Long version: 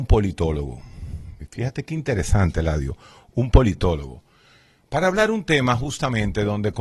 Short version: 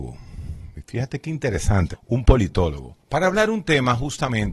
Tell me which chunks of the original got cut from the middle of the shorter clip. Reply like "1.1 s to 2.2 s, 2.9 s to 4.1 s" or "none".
2.5 s to 3.2 s, 4.3 s to 4.8 s